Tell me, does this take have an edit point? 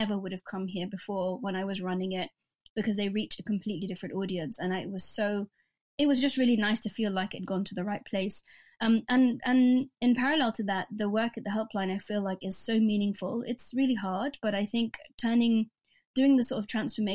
no; 0 cuts

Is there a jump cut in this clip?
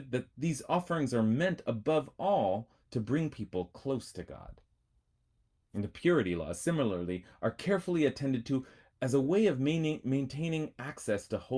no; 0 cuts

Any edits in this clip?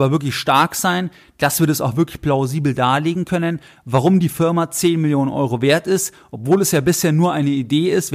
no; 0 cuts

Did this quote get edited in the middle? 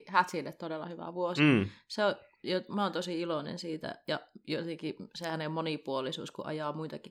no; 0 cuts

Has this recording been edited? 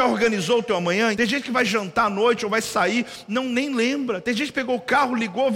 yes; 1 cut; at 1.1 s

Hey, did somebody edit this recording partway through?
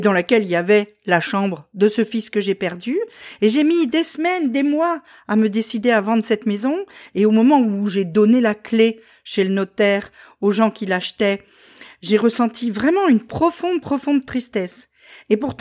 no; 0 cuts

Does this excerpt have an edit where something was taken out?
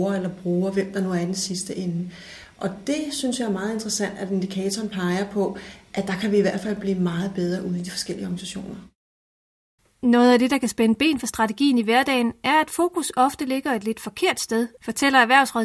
no; 0 cuts

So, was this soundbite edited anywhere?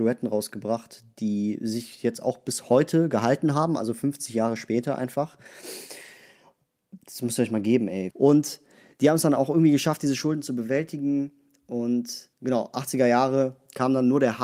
yes; 2 cuts; at 8.1 s, 12.3 s

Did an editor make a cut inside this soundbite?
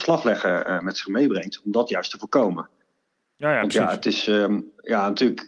no; 0 cuts

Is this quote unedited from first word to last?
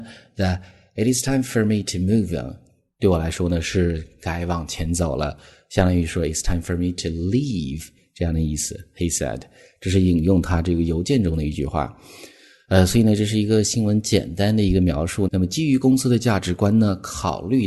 no; 1 cut; at 15.3 s

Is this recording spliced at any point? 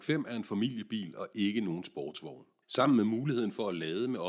yes; 1 cut; at 2.6 s

